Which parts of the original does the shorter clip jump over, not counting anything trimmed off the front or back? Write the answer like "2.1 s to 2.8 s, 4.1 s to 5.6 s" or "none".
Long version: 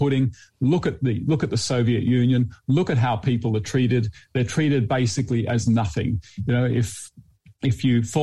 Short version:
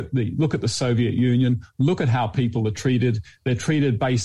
none